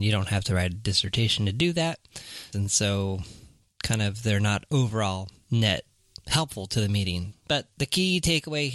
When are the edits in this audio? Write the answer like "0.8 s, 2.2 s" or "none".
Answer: 2.5 s, 7.3 s